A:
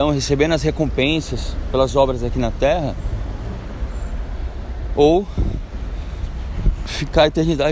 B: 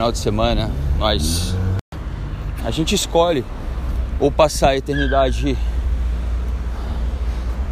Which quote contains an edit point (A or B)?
B